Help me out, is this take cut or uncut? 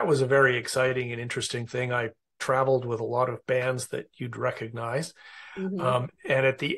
uncut